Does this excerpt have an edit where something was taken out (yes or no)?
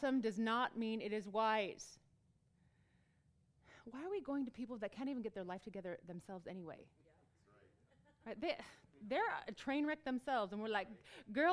no